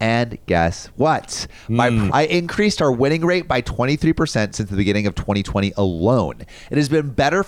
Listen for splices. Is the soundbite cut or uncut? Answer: cut